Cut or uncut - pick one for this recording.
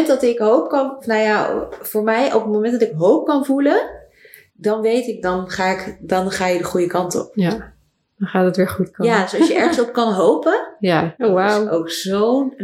cut